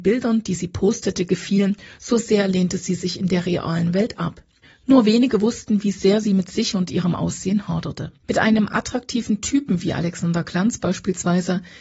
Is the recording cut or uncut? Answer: cut